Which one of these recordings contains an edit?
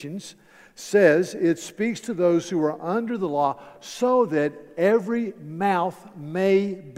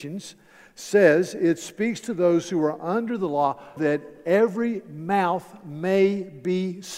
second; 1 cut; at 3.8 s

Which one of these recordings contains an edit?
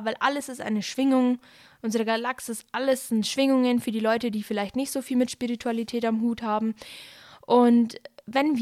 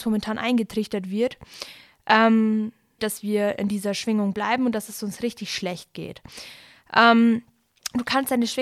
second; 1 cut; at 3.0 s

